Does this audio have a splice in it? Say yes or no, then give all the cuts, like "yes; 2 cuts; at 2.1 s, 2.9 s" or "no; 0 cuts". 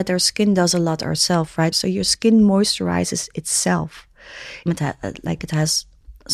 yes; 2 cuts; at 1.7 s, 4.7 s